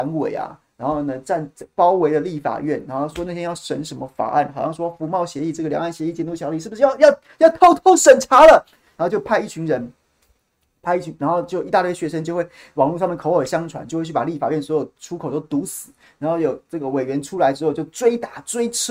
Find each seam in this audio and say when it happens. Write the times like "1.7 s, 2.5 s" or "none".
none